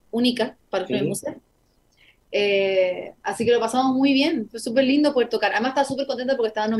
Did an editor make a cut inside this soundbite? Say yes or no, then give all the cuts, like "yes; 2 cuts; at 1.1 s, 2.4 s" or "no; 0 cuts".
no; 0 cuts